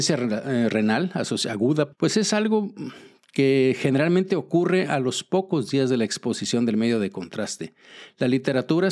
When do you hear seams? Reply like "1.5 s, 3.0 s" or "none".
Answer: 1.9 s

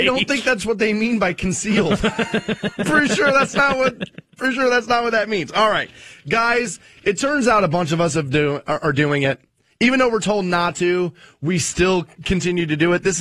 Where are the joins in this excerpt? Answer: none

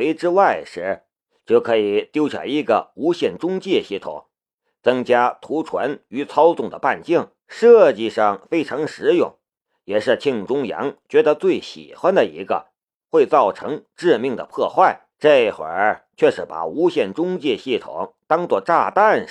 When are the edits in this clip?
7.4 s, 13.1 s, 15.1 s

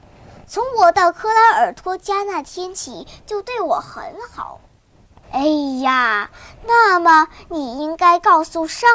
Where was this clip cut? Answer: 5.2 s

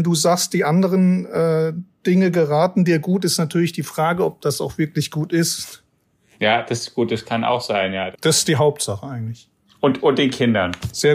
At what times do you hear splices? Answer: 8.1 s

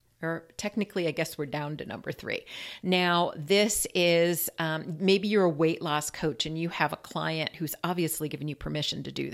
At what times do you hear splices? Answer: 2.8 s

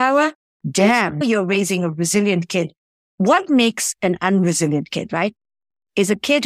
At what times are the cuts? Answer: 1.2 s

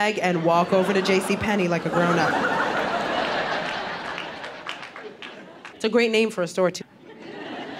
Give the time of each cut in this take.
5.7 s, 6.8 s

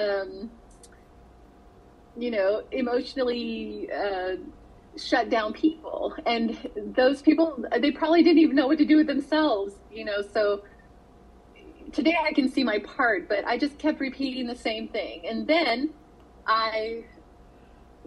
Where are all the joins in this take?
none

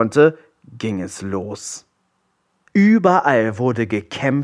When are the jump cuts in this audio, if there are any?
2.7 s

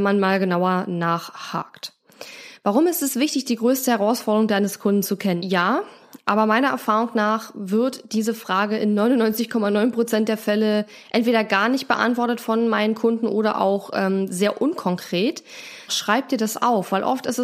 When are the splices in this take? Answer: 5.4 s, 15.9 s

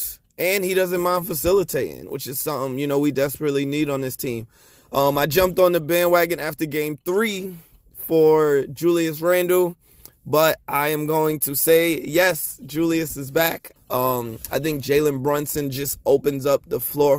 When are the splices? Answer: 13.8 s

